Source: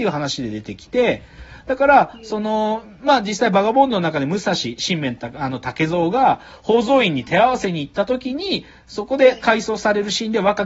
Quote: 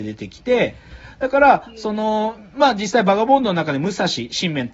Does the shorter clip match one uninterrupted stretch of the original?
yes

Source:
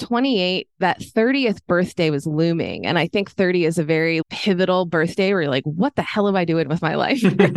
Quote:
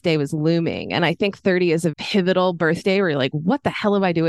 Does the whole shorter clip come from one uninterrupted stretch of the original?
no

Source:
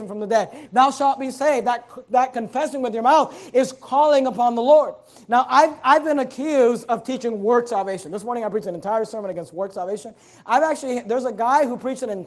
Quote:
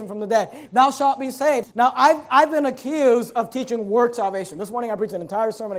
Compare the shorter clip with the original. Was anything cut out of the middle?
yes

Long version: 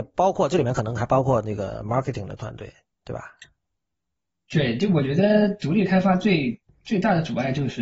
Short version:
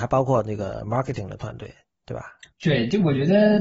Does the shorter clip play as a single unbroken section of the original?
no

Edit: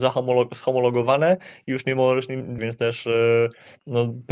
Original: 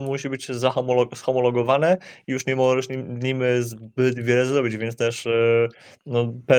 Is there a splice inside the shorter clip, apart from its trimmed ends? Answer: yes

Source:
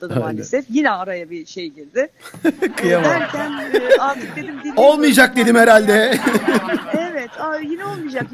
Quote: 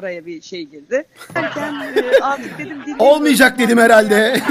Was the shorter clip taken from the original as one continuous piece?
no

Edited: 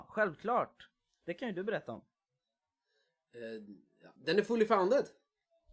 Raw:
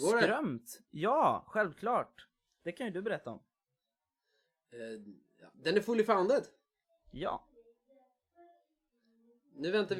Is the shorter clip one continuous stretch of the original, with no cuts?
yes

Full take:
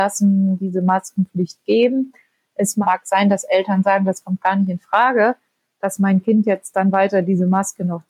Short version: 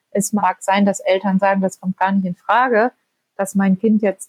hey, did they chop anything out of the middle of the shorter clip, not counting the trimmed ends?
no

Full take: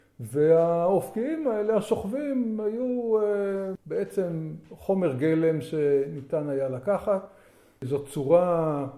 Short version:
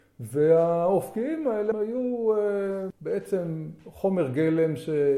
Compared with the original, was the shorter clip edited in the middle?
yes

